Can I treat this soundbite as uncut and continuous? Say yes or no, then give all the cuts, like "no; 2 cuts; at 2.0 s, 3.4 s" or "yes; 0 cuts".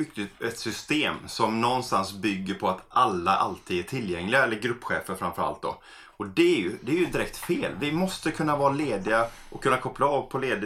yes; 0 cuts